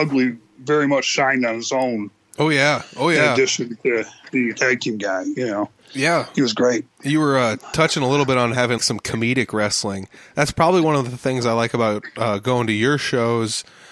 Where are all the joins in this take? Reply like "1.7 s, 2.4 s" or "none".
8.8 s

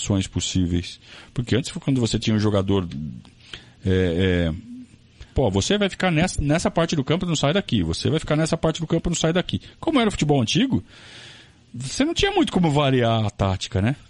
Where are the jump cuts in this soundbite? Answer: 5.4 s

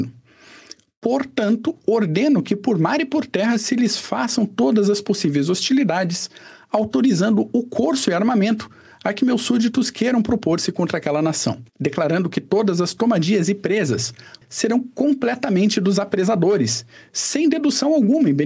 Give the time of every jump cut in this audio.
11.7 s, 14.4 s

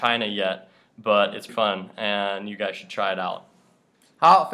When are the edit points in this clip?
1.5 s

